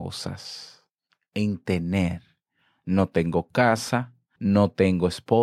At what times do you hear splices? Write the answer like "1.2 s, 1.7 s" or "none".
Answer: 4.4 s